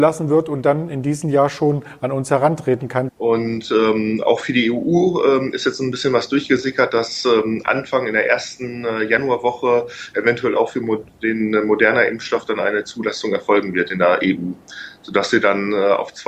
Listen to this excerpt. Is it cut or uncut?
cut